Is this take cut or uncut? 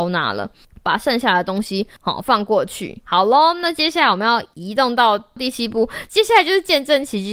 cut